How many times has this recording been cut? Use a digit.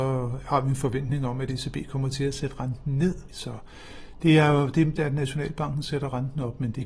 2